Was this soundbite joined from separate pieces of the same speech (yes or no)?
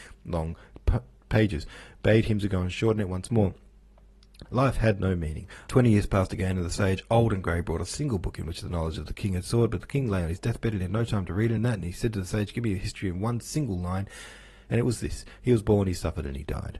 yes